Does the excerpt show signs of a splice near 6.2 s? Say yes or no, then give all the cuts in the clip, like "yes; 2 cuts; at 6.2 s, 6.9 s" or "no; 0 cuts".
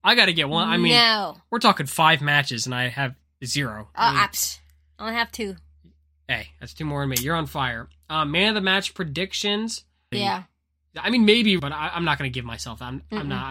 no; 2 cuts; at 10.1 s, 11.6 s